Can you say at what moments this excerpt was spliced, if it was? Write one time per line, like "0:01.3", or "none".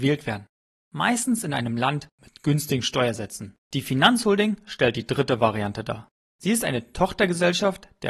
0:03.6
0:06.3